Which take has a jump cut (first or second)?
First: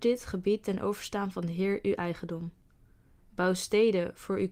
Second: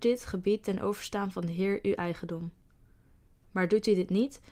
first